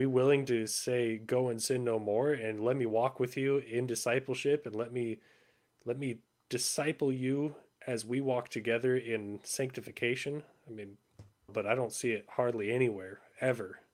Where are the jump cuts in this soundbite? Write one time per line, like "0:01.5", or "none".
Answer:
0:11.5